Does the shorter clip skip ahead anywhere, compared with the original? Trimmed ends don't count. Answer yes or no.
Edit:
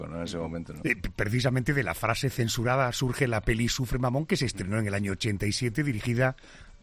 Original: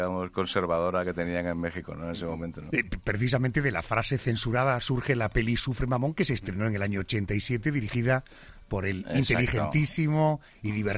no